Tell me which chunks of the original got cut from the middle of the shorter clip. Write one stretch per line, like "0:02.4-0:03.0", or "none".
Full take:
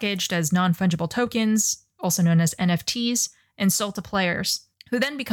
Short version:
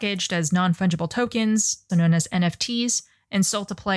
0:01.9-0:02.2